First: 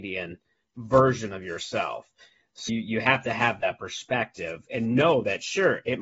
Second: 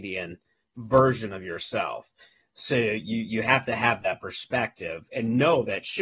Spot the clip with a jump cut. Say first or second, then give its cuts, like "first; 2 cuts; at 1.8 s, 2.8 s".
first; 1 cut; at 2.7 s